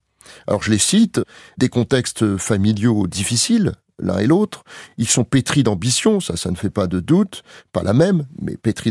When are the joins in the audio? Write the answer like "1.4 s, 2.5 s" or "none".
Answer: none